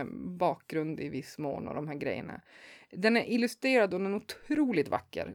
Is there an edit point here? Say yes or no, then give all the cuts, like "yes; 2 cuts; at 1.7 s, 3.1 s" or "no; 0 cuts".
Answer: no; 0 cuts